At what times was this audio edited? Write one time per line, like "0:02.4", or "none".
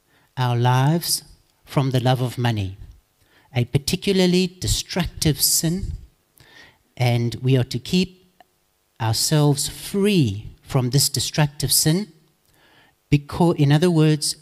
0:13.0